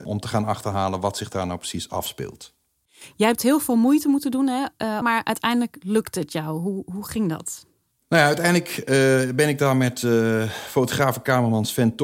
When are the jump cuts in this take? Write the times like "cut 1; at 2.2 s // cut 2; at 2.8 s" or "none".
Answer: cut 1; at 5.0 s

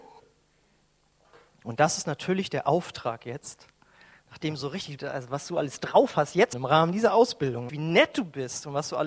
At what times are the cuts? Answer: cut 1; at 5.0 s // cut 2; at 6.5 s // cut 3; at 7.7 s

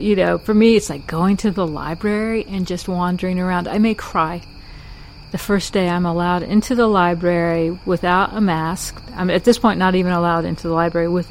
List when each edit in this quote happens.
none

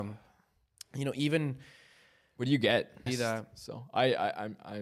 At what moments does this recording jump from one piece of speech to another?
cut 1; at 3.1 s

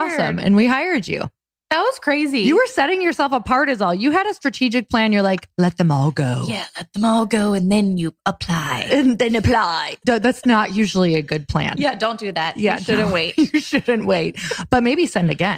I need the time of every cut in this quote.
none

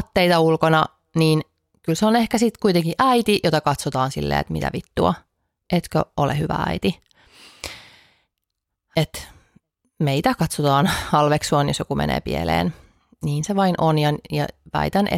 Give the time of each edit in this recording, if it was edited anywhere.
none

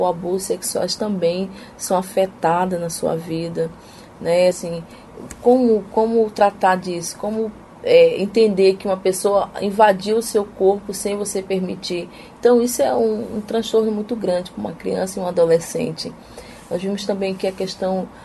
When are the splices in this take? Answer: none

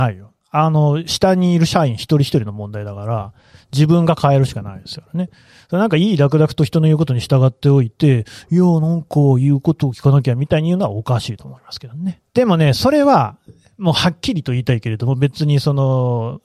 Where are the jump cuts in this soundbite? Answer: cut 1; at 12.2 s

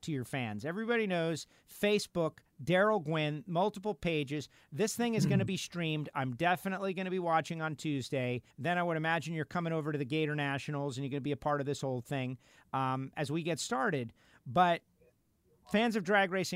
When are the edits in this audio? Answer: cut 1; at 8.5 s

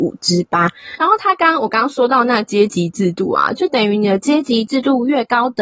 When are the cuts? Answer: cut 1; at 1.0 s

